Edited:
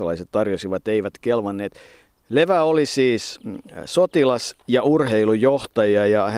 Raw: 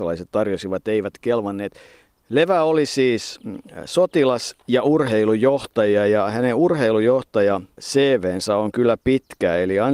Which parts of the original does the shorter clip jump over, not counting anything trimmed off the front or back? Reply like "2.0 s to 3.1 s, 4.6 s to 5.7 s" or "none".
none